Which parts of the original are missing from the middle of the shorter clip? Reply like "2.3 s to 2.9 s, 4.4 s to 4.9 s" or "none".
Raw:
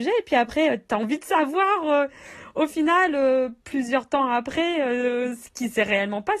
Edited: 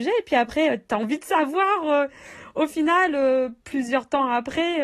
none